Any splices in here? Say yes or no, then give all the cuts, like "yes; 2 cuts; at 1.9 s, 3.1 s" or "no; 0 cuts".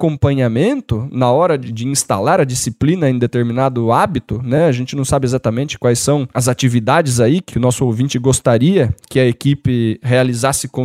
no; 0 cuts